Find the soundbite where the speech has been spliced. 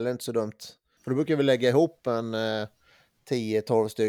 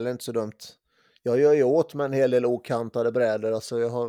first; 1 cut; at 1.0 s

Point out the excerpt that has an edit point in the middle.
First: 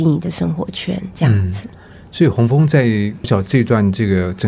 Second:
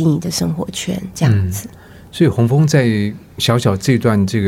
first; 1 cut; at 3.2 s

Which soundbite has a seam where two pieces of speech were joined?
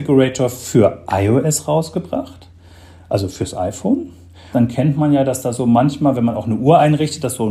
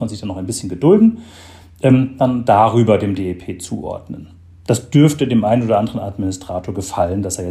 first; 1 cut; at 4.5 s

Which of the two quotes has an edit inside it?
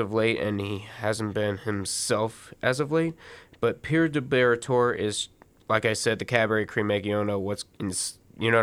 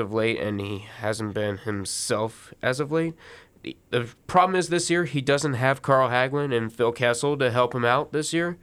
second; 1 cut; at 3.5 s

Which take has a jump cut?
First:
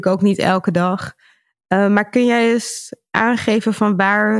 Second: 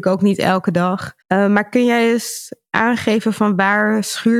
second; 1 cut; at 1.2 s

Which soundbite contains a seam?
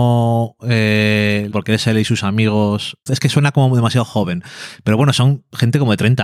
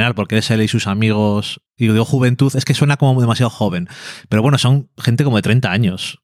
first; 2 cuts; at 1.5 s, 3.1 s

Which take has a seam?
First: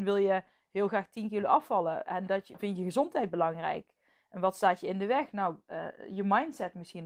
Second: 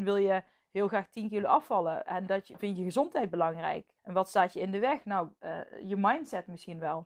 second; 1 cut; at 4.0 s

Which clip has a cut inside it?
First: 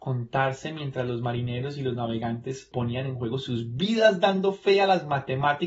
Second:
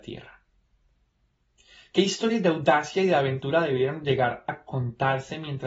first; 1 cut; at 2.7 s

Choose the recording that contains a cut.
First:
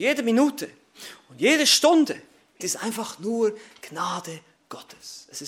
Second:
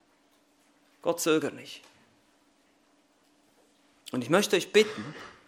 first; 1 cut; at 2.6 s

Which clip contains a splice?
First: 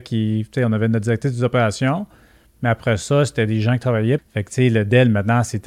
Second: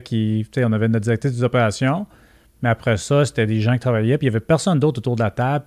first; 1 cut; at 4.2 s

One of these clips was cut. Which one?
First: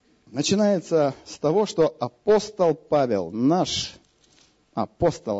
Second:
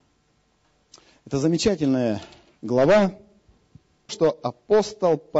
second; 1 cut; at 4.1 s

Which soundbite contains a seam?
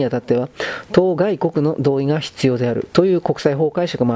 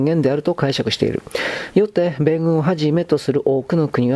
second; 1 cut; at 1.7 s

